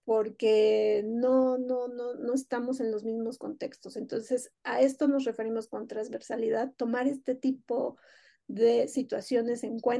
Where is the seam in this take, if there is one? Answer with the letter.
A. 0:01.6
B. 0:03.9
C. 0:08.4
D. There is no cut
D